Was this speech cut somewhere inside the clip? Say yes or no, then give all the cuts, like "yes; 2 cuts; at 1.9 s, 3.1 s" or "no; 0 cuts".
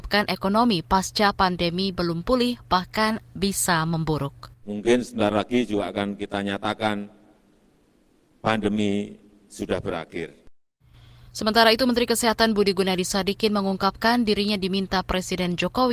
yes; 1 cut; at 4.6 s